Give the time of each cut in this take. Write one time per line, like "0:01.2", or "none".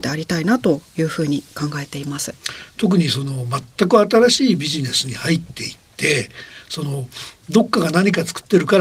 none